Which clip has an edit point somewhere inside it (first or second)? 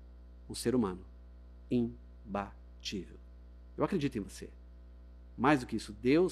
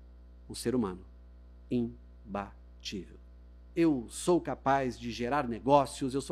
second